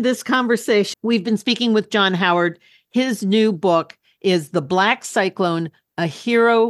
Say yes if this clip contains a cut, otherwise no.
yes